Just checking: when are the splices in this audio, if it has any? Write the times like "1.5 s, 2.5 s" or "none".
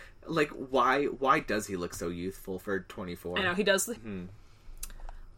4.0 s